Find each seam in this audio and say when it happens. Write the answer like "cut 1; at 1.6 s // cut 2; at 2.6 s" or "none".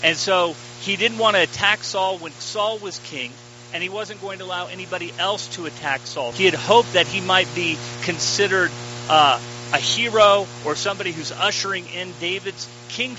cut 1; at 6.3 s